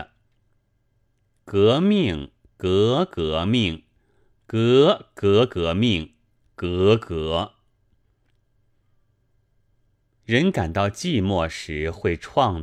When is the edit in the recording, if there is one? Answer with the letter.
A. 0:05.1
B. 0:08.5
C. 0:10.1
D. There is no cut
D